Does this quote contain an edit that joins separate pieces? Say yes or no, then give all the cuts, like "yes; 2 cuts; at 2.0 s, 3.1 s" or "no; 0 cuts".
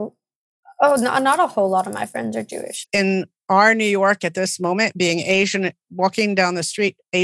yes; 1 cut; at 2.8 s